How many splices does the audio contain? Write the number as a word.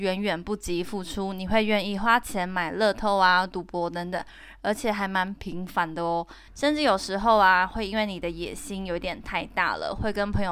one